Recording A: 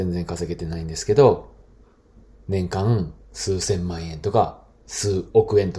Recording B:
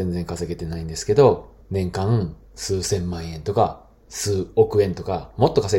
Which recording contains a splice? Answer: B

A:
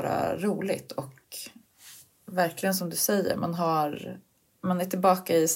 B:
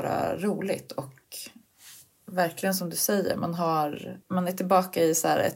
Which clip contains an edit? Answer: B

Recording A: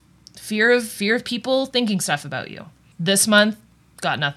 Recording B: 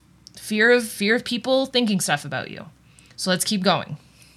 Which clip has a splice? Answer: A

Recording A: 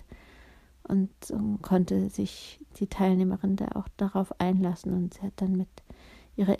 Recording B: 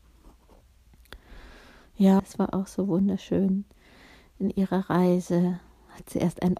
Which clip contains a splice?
B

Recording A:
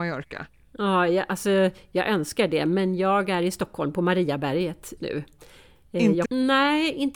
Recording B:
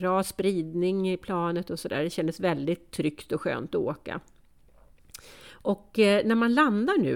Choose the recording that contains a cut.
A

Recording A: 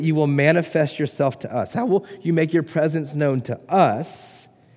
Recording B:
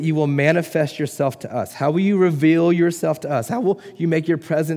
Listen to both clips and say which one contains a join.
A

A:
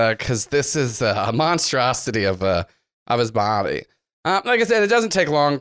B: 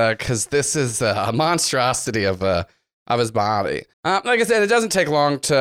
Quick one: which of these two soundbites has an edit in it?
B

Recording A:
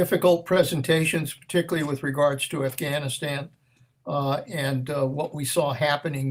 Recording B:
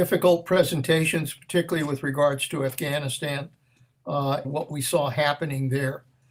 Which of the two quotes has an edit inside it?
B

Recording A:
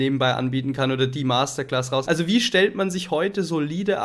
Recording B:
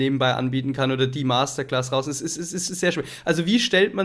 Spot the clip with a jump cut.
A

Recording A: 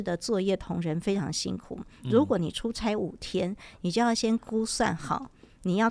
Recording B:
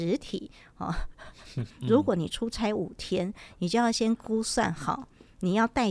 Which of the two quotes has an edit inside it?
B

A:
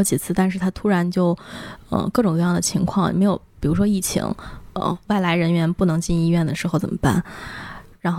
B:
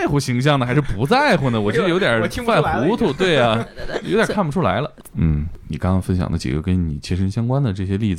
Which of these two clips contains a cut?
B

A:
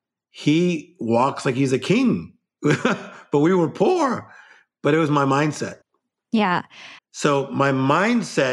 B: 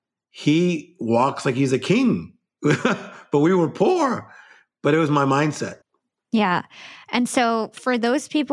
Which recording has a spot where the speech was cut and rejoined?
A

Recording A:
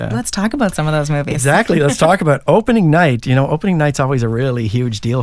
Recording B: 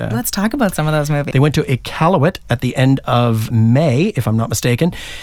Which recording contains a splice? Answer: B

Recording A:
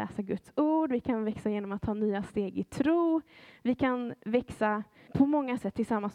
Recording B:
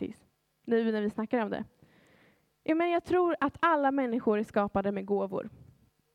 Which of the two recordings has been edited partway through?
A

